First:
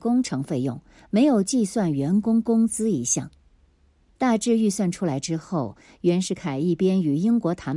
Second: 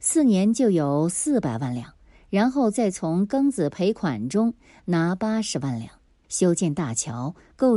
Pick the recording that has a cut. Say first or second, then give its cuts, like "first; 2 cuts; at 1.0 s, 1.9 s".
second; 1 cut; at 6.2 s